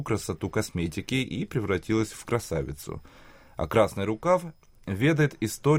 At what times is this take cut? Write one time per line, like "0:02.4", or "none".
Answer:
none